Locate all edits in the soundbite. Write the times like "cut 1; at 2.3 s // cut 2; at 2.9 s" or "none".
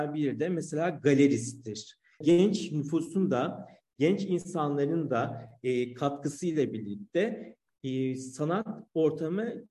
cut 1; at 2.2 s